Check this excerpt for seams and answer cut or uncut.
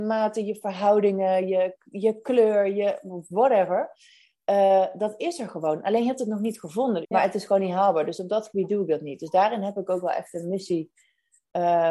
cut